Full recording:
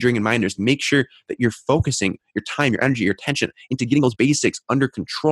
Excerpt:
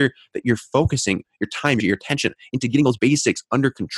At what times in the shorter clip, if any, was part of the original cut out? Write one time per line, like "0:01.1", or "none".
0:01.8